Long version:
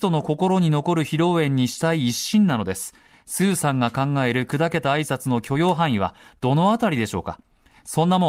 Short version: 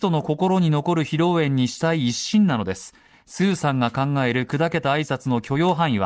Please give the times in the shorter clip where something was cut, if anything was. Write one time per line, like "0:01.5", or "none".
none